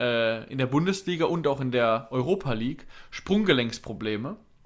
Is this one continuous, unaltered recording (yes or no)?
yes